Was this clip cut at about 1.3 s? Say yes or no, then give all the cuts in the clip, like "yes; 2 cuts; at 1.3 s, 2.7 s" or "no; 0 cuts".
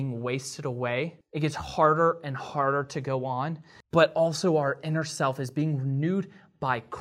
no; 0 cuts